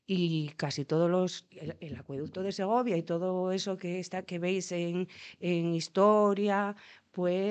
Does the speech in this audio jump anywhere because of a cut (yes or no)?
no